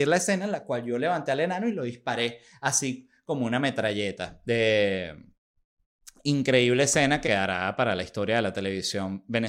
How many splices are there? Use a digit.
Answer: 1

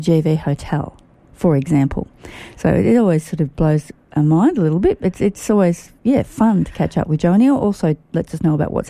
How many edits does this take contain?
0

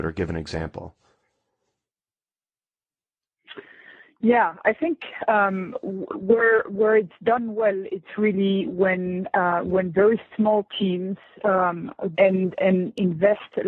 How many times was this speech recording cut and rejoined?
1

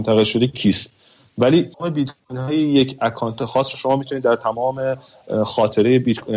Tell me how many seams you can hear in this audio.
1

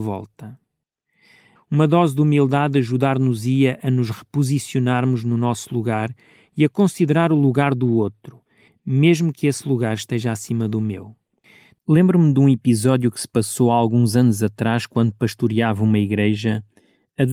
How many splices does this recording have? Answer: 1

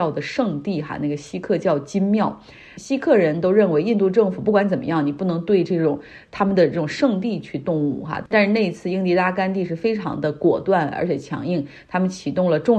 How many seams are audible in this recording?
0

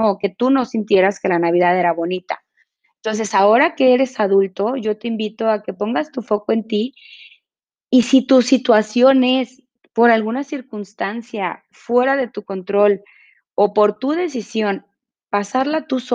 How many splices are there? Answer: 0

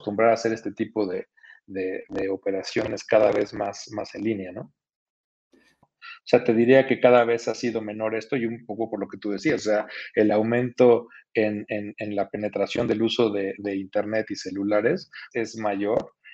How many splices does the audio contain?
2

